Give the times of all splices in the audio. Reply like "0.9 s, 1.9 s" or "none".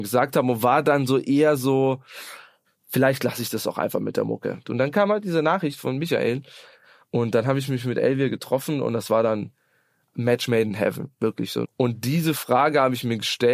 4.6 s, 11.6 s

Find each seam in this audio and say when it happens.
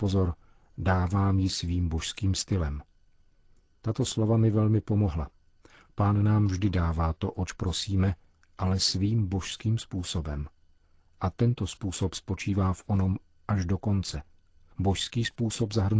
none

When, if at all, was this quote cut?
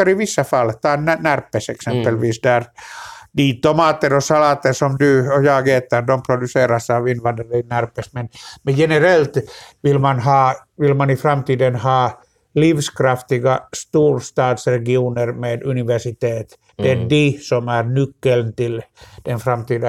none

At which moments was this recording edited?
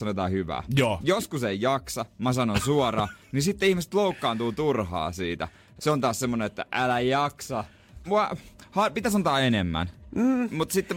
5.8 s, 8.1 s

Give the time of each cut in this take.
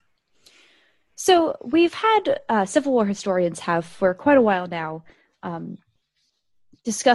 none

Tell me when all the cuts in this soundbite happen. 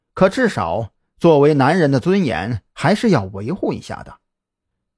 none

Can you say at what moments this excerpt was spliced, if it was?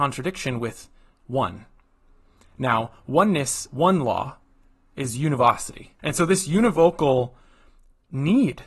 3.7 s, 6.0 s

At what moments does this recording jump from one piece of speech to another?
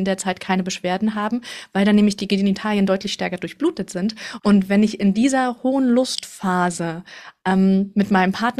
4.4 s

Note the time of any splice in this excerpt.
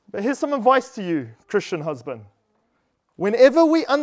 none

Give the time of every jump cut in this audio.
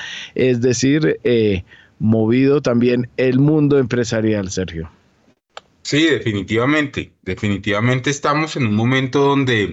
none

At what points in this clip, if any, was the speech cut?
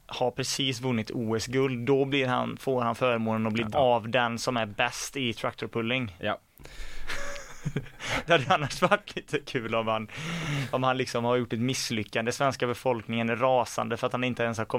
3.7 s

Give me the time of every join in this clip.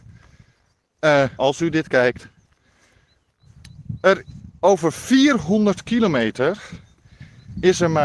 1.4 s

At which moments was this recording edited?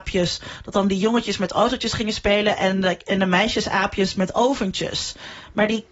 none

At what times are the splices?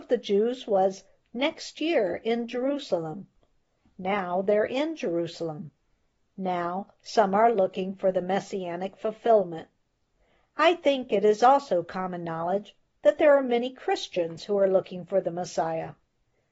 none

